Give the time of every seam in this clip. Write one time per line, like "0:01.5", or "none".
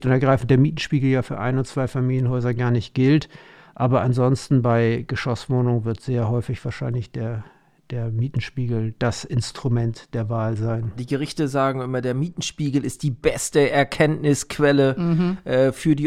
0:11.0